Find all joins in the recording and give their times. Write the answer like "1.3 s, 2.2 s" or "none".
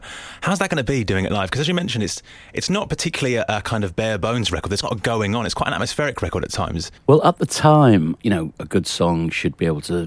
4.8 s, 7.0 s, 8.2 s